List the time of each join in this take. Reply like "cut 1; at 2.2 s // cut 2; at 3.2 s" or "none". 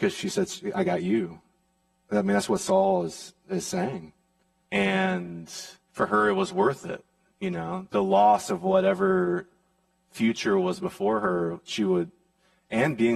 cut 1; at 4.6 s // cut 2; at 5.8 s